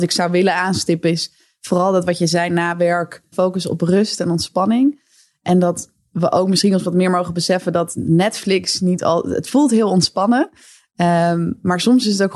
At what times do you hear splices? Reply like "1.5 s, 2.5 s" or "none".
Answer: 3.3 s